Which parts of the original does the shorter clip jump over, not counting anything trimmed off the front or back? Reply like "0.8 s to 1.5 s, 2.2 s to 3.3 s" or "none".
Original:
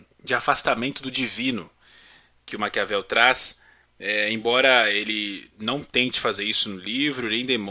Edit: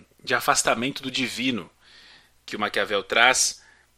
none